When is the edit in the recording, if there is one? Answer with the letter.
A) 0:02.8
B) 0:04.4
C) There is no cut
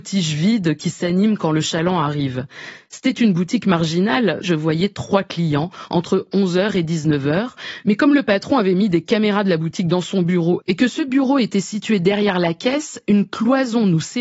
B